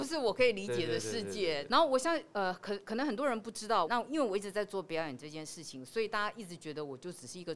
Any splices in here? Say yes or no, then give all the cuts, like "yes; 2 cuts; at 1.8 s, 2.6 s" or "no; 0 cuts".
yes; 2 cuts; at 1.7 s, 3.8 s